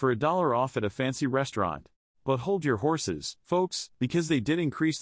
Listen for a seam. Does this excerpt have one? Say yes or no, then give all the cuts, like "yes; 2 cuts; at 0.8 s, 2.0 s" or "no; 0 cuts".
yes; 1 cut; at 2.1 s